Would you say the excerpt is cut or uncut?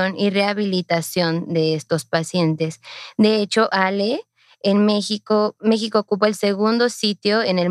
uncut